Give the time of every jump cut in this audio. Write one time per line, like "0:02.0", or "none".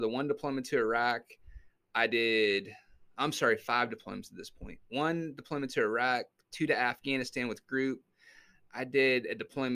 none